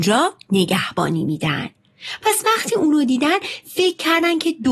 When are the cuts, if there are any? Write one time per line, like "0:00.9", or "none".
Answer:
none